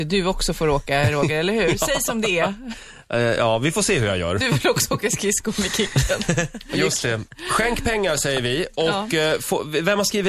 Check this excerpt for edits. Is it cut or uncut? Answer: uncut